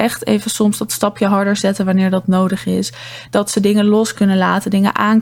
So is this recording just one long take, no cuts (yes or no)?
yes